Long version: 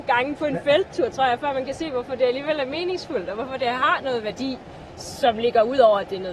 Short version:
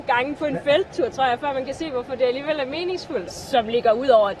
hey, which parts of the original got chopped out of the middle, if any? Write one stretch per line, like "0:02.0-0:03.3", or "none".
0:03.3-0:05.0